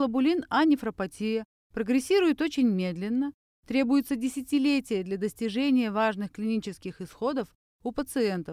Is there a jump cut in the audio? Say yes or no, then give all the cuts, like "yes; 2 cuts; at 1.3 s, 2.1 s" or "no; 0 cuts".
no; 0 cuts